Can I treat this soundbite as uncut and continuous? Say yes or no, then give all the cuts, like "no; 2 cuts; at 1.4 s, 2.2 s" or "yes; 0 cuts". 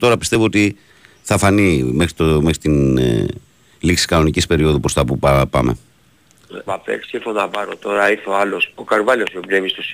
no; 2 cuts; at 6.7 s, 8.7 s